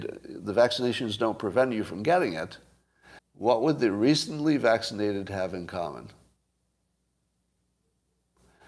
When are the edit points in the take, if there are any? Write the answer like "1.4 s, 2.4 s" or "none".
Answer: 3.2 s